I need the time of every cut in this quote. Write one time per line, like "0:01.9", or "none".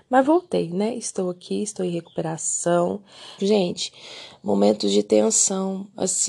0:03.4